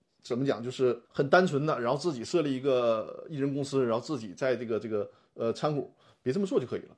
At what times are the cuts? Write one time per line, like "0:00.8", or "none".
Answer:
none